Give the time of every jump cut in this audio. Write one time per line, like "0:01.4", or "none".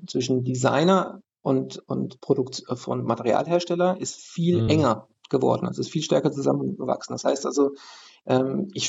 none

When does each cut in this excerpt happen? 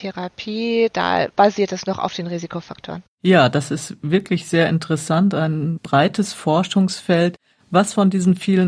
none

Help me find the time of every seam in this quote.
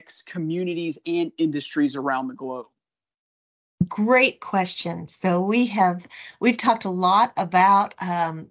none

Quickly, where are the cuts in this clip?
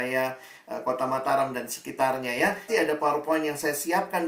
0:02.7

